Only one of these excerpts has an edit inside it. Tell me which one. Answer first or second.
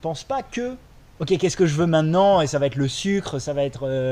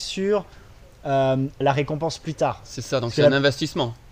second